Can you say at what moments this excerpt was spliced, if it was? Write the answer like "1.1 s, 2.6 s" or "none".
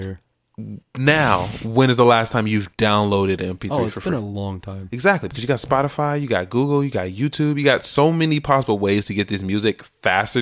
none